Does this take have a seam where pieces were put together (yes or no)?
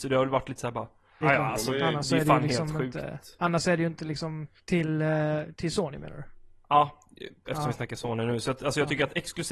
yes